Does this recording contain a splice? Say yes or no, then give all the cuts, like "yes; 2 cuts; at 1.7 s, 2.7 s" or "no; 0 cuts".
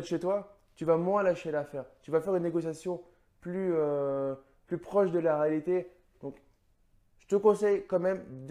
yes; 1 cut; at 6.1 s